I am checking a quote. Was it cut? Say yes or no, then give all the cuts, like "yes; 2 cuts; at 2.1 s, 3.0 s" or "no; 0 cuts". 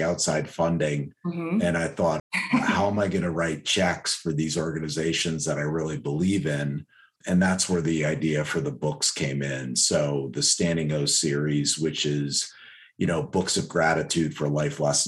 yes; 2 cuts; at 2.2 s, 7.2 s